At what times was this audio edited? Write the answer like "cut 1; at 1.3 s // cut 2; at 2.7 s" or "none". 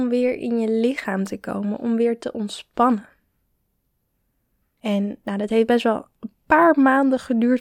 cut 1; at 4.6 s